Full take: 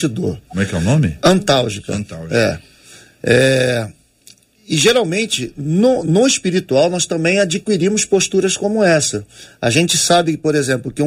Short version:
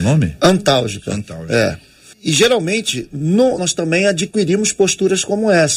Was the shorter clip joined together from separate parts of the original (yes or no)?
yes